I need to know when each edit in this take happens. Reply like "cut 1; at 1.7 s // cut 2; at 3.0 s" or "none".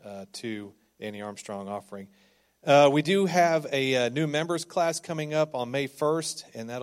none